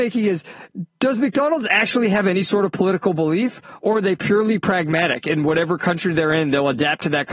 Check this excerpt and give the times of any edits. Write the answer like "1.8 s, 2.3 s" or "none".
none